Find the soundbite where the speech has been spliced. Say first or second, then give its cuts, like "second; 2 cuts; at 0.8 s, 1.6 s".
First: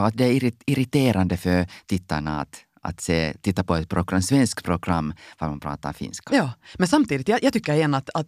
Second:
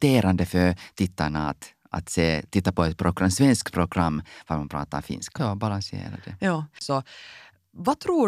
second; 2 cuts; at 5.4 s, 6.8 s